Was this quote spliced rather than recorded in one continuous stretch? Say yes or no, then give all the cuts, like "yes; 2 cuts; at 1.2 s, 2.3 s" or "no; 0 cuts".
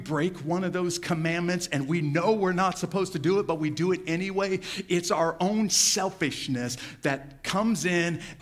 no; 0 cuts